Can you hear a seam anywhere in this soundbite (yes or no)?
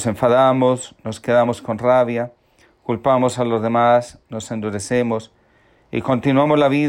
no